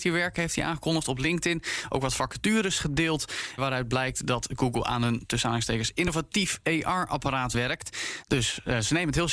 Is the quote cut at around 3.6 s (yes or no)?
yes